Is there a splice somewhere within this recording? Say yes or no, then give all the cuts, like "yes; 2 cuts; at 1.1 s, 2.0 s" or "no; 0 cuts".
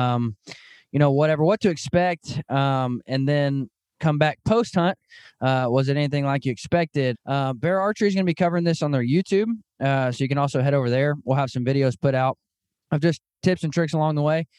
yes; 1 cut; at 7.1 s